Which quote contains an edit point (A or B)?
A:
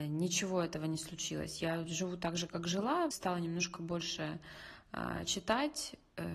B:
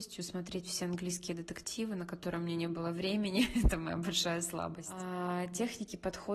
A